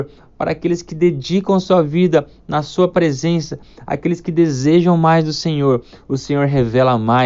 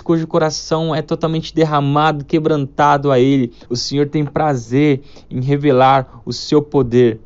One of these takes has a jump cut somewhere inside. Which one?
second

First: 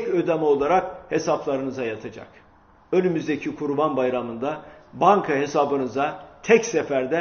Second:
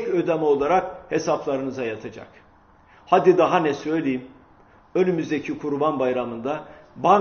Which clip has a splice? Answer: first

